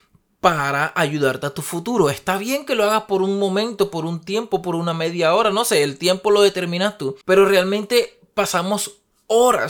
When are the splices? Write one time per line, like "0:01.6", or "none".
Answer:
0:07.2